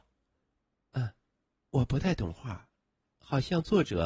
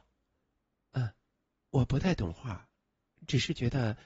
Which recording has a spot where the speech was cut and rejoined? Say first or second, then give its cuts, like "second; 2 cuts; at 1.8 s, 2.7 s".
first; 1 cut; at 3.0 s